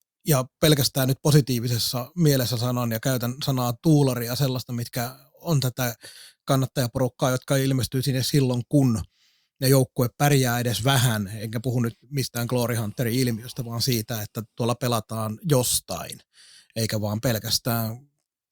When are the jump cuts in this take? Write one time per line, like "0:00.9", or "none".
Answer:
0:12.0